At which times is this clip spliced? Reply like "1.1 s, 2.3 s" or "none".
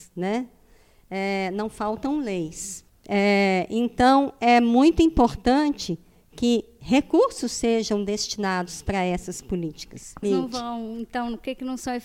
2.9 s, 10.2 s

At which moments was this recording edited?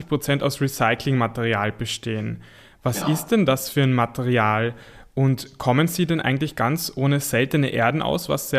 none

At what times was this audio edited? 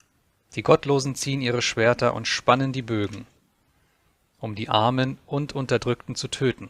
none

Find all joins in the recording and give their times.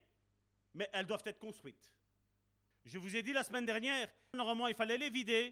2.7 s, 4.3 s

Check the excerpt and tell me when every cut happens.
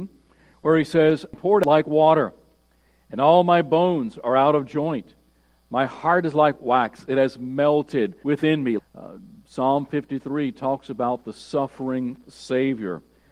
8.8 s

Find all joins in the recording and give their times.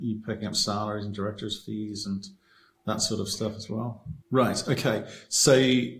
4.2 s

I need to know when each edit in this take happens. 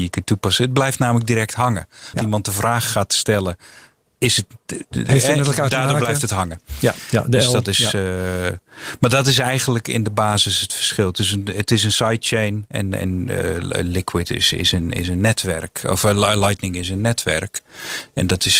2.1 s

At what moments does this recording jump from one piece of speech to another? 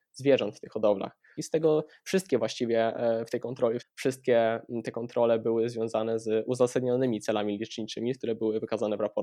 1.4 s, 3.8 s

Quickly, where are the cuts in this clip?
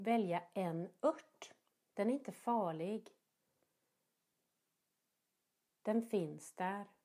1.9 s

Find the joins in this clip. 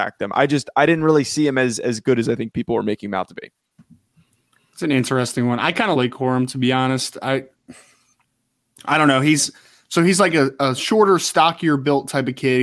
5.9 s

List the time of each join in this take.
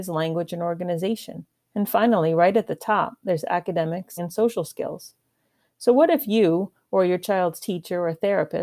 4.2 s

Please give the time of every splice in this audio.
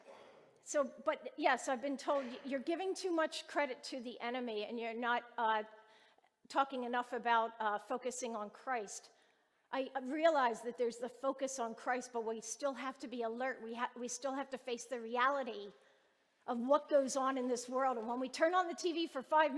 none

